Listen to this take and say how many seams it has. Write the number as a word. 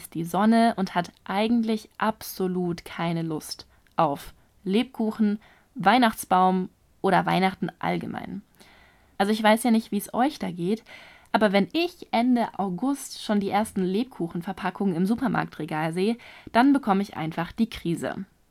zero